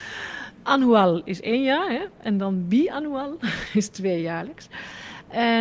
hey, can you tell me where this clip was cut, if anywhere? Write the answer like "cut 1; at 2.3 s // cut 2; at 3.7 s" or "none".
none